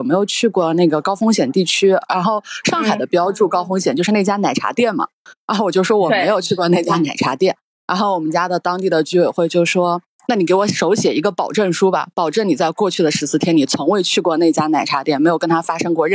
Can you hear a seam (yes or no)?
no